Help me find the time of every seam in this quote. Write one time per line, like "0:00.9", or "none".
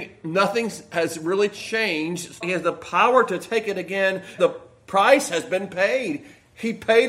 0:02.4
0:04.4